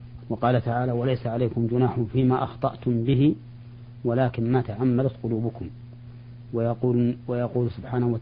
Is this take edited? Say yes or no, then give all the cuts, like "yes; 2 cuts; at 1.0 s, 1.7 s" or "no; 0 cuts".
no; 0 cuts